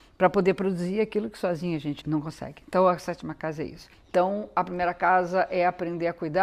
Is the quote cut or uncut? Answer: cut